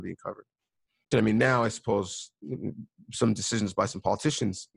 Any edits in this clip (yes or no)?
yes